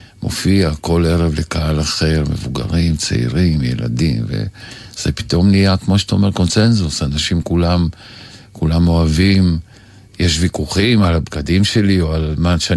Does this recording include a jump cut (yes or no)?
no